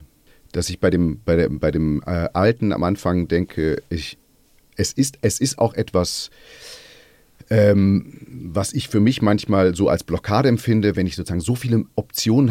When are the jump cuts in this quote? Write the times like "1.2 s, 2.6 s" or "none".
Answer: none